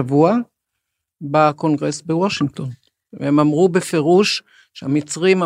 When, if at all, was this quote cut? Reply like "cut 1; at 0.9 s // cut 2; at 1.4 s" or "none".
none